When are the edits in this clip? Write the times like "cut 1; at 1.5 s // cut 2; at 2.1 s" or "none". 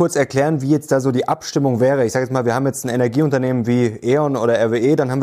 none